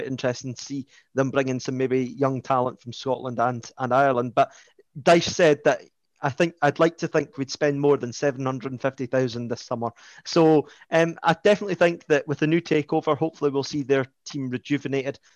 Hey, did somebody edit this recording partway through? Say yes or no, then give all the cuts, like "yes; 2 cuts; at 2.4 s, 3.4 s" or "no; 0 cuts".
no; 0 cuts